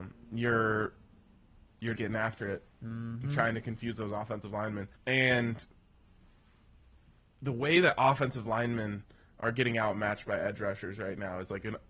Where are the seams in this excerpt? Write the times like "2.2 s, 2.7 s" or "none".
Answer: 1.9 s, 4.9 s